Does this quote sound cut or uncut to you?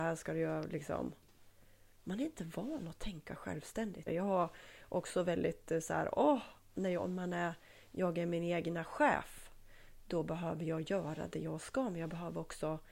cut